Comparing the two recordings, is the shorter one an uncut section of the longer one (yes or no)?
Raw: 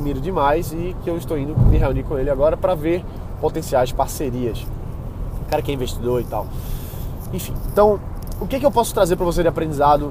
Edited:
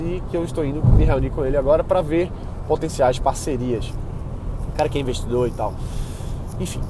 yes